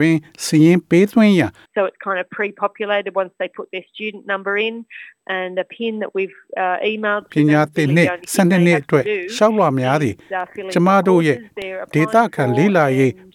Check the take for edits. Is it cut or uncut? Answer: cut